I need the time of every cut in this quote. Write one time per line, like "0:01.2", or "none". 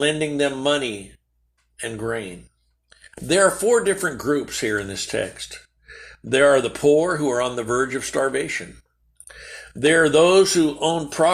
0:03.1